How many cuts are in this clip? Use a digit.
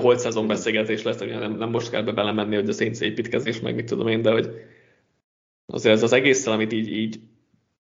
0